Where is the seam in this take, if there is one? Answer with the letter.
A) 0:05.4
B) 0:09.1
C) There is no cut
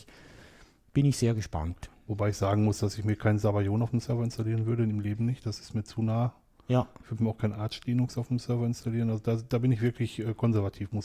C